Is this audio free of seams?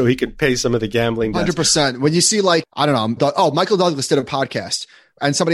no; 1 cut; at 3.2 s

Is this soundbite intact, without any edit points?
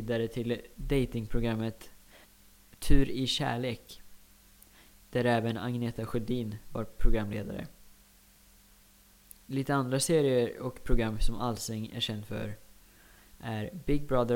yes; 0 cuts

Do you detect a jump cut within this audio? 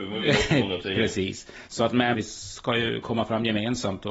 yes; 1 cut; at 2.1 s

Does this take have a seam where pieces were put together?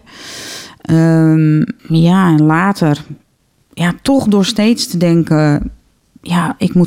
yes; 1 cut; at 1.8 s

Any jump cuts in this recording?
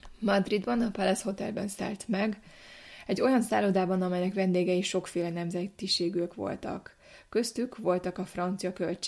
no; 0 cuts

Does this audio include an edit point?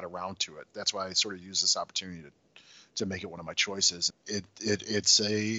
yes; 1 cut; at 4.1 s

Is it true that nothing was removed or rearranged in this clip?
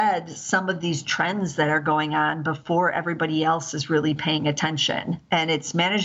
yes; 0 cuts

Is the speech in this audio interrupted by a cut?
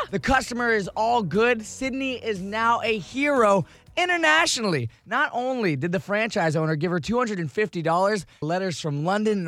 yes; 1 cut; at 8.4 s

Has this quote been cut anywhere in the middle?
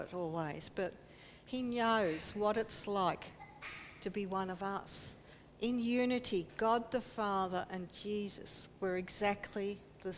yes; 1 cut; at 5.5 s

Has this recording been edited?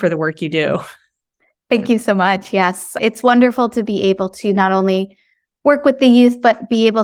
no; 0 cuts

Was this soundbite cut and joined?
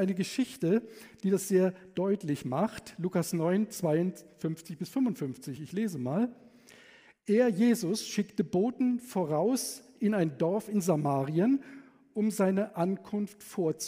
no; 0 cuts

